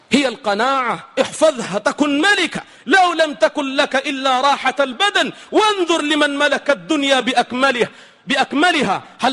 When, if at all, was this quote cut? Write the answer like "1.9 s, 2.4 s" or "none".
none